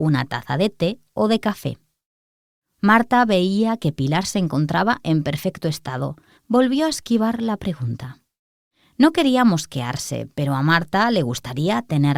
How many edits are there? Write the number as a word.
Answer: one